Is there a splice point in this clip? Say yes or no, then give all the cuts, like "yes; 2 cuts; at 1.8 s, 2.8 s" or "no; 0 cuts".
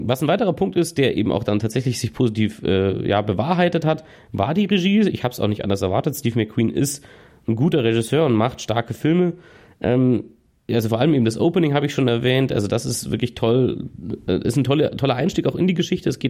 no; 0 cuts